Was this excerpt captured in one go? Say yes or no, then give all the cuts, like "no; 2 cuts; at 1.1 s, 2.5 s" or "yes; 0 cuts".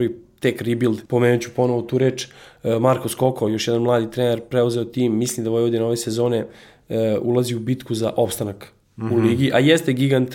no; 1 cut; at 1.1 s